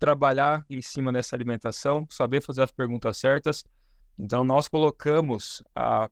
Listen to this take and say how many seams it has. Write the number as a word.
one